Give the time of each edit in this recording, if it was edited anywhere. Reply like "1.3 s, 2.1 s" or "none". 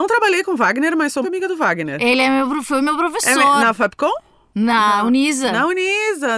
1.2 s